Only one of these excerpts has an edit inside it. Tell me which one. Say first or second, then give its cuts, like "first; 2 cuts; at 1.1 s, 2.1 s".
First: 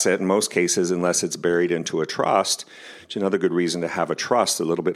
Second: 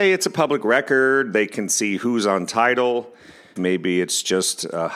second; 1 cut; at 3.6 s